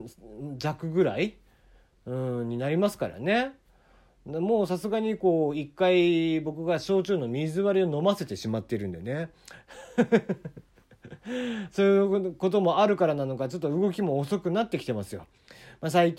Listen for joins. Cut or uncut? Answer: uncut